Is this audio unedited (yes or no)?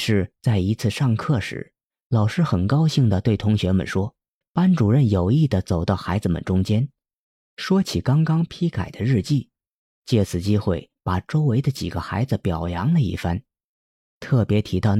no